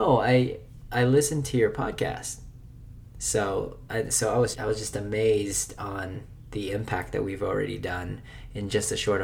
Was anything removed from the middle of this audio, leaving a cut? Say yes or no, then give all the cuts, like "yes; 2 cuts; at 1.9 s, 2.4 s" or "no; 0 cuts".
yes; 1 cut; at 4.5 s